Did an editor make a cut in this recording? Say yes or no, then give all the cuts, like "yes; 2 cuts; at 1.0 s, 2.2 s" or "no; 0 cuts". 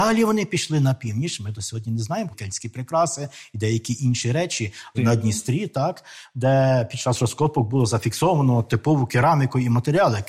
yes; 2 cuts; at 2.3 s, 4.9 s